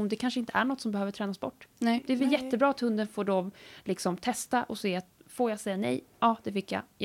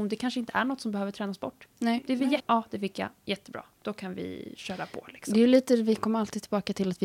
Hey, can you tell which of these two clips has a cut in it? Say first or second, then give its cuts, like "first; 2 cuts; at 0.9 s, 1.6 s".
second; 1 cut; at 2.4 s